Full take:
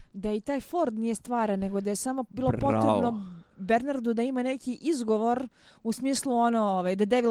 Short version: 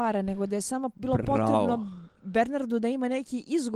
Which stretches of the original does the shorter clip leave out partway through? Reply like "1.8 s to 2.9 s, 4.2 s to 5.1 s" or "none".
none